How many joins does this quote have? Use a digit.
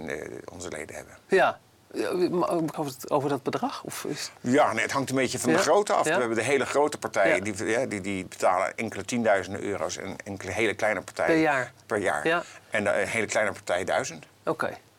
2